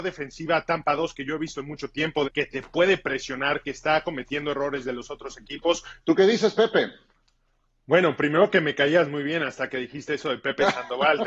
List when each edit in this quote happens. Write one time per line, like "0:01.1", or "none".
0:02.2
0:06.0